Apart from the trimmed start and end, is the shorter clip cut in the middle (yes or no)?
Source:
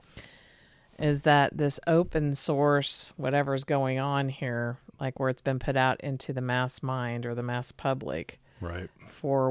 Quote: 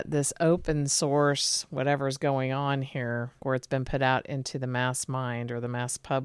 yes